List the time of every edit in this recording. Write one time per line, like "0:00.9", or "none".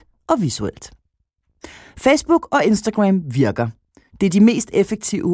none